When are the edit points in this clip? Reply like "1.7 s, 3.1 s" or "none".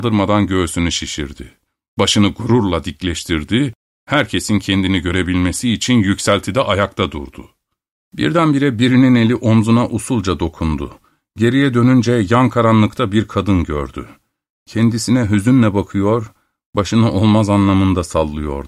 none